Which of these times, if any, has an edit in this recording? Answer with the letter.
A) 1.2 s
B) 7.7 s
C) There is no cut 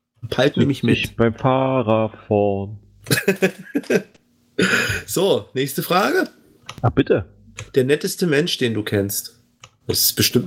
C